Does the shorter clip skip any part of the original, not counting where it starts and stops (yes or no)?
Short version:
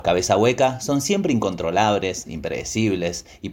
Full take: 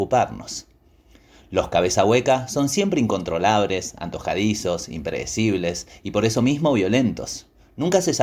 yes